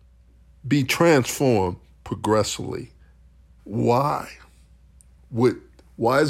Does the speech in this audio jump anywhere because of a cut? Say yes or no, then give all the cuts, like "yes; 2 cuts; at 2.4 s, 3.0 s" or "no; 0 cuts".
yes; 1 cut; at 3.6 s